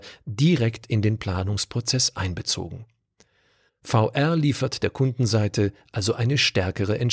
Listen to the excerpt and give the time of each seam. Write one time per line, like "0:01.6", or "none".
0:03.7